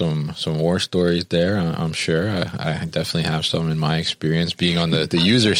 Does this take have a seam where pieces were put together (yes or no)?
no